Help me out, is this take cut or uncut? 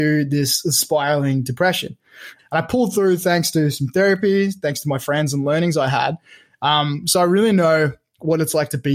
cut